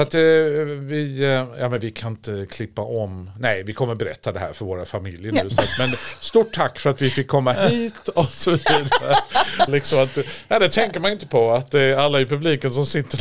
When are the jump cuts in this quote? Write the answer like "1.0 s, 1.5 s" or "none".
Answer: 9.7 s